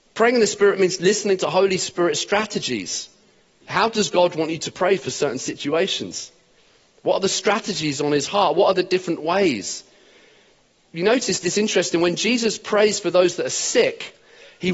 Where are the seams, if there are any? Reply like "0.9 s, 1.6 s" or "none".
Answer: none